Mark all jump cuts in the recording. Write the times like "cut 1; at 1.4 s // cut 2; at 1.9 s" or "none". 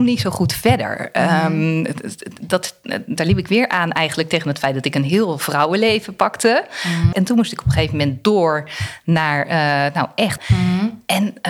cut 1; at 7.1 s // cut 2; at 10.4 s